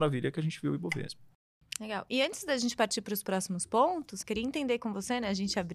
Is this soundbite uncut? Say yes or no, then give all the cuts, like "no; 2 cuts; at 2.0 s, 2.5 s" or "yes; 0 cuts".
no; 1 cut; at 4.2 s